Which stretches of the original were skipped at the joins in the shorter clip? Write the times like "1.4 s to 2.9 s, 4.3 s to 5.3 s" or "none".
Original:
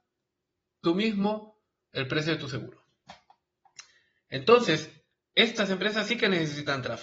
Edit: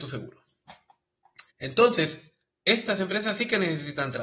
3.9 s to 4.2 s